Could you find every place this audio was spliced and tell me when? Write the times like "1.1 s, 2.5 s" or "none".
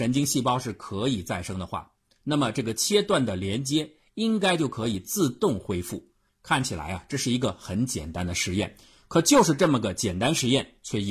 6.3 s